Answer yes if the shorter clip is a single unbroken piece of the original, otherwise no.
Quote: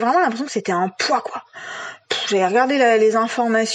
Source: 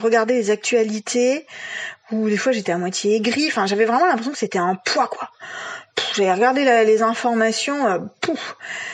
yes